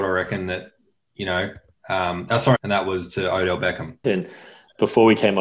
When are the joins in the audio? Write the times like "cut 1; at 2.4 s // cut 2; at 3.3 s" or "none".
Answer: cut 1; at 2.6 s // cut 2; at 4.0 s